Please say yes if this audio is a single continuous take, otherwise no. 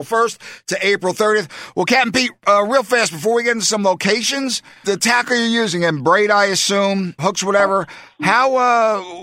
no